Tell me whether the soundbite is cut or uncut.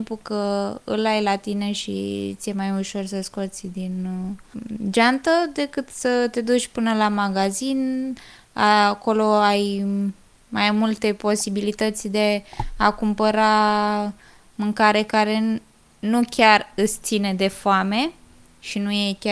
uncut